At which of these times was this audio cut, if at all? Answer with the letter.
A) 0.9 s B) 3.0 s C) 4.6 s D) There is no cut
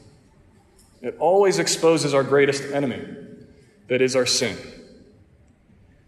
A